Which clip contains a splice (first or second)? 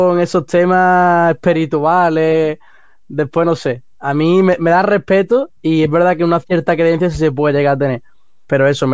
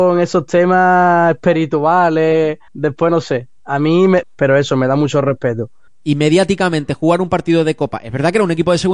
second